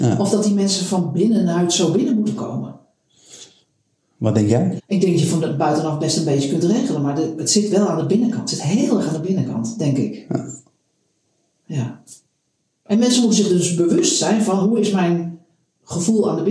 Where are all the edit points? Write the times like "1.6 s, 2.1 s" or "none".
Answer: 4.8 s